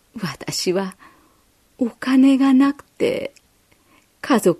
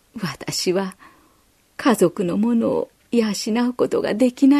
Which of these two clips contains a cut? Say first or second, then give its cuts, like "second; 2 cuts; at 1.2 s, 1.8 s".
second; 1 cut; at 1.6 s